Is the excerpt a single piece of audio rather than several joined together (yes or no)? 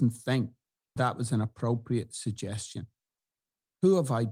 no